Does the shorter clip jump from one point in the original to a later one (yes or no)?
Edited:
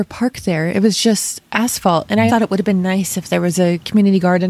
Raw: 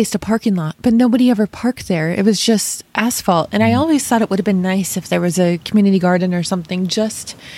yes